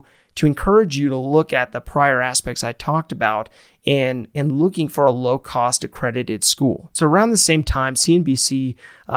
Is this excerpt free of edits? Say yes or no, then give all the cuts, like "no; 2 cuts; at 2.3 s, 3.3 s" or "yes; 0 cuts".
yes; 0 cuts